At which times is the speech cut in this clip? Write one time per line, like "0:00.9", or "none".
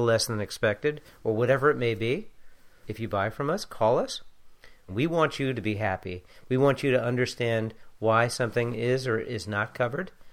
0:02.8
0:04.9